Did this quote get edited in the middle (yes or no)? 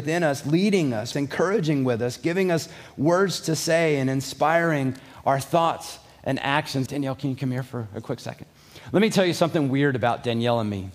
yes